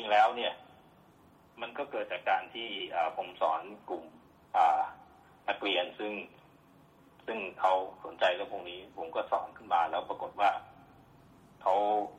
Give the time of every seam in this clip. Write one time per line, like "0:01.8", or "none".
none